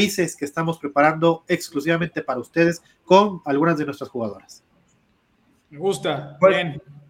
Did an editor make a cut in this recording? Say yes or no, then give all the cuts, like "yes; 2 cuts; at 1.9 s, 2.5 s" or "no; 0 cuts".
no; 0 cuts